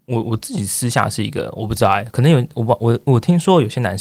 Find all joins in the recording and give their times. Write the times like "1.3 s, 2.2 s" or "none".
none